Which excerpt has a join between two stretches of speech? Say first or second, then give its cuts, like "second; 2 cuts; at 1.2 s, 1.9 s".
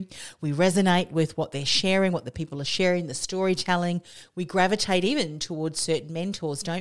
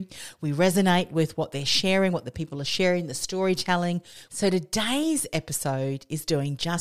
second; 1 cut; at 4.3 s